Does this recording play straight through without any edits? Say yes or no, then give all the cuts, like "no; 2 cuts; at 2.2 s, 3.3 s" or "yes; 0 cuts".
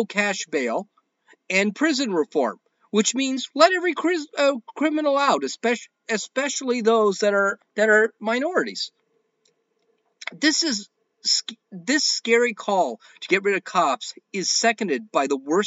no; 1 cut; at 7.6 s